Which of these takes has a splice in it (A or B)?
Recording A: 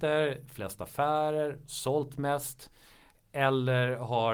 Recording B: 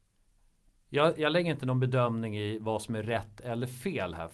B